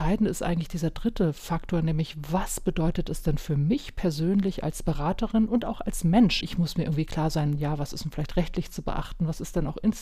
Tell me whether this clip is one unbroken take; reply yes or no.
no